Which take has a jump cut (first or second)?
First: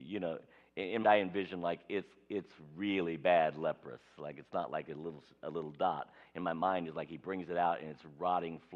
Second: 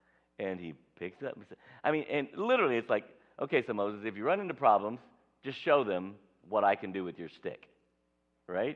first